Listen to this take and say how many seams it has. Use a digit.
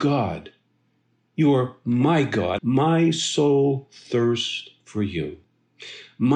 1